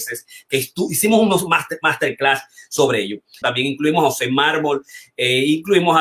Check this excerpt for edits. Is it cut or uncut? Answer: cut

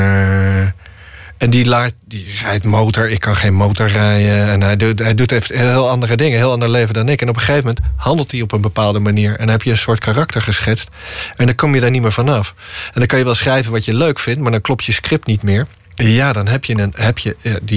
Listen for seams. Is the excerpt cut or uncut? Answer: cut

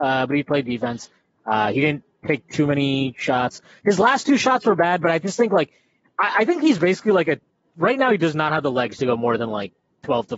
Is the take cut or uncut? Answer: uncut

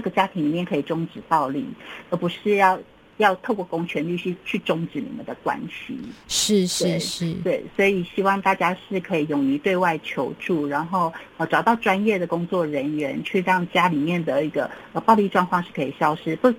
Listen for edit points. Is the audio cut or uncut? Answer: uncut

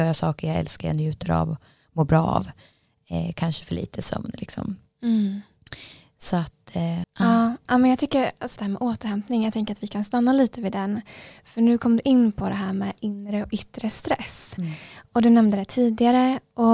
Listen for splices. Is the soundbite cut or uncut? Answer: cut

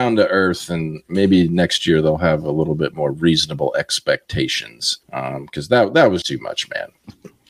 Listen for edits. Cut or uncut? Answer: cut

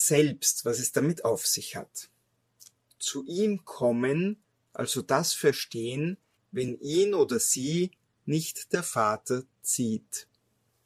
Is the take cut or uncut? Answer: cut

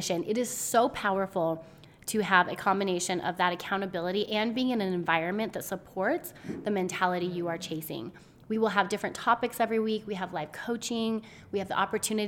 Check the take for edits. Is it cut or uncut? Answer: uncut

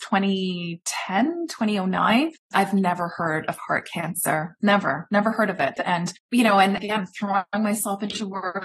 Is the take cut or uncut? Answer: cut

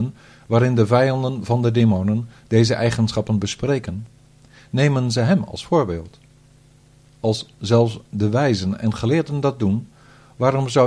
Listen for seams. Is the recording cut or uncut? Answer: uncut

